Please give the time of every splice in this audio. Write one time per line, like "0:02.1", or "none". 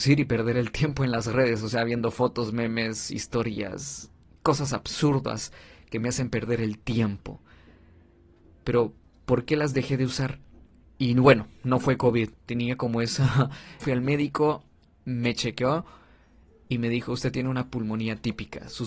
0:10.8
0:12.3
0:13.8